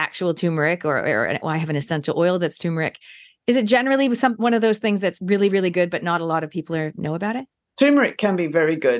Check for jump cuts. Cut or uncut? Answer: uncut